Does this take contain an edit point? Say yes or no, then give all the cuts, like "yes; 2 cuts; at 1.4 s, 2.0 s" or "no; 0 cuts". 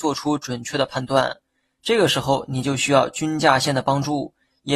no; 0 cuts